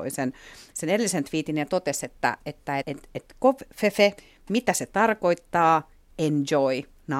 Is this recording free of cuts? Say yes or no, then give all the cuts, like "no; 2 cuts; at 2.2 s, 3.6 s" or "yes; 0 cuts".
no; 1 cut; at 2.8 s